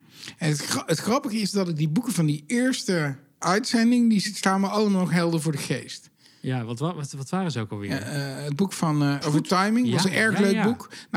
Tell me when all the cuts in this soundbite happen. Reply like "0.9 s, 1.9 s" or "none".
9.2 s